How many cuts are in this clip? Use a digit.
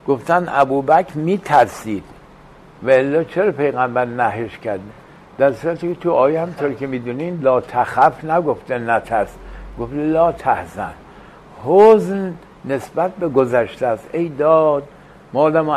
0